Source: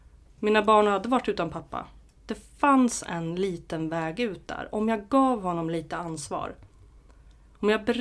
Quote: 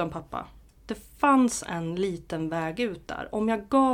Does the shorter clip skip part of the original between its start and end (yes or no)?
no